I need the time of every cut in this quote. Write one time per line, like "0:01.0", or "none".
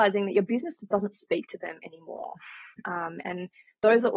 none